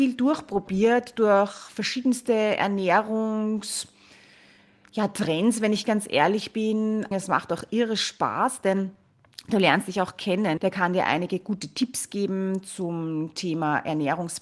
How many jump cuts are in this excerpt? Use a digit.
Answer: 2